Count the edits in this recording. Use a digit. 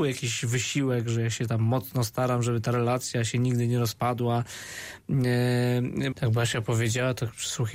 1